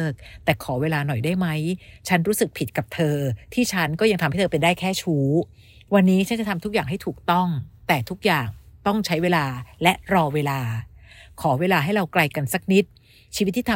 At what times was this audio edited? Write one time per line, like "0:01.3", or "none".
none